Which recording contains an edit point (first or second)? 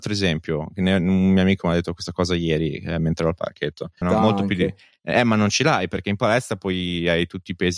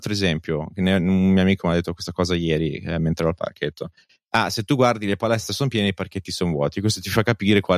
first